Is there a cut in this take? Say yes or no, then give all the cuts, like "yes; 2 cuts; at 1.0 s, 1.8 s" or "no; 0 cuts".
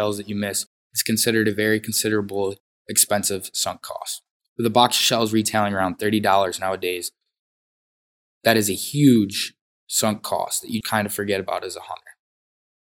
yes; 1 cut; at 10.8 s